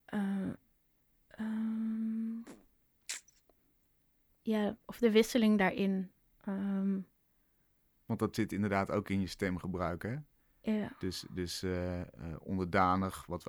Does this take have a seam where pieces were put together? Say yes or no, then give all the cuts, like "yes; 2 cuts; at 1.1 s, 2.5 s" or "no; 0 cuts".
no; 0 cuts